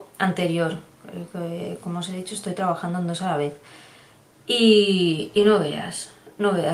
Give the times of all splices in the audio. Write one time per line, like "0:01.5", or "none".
none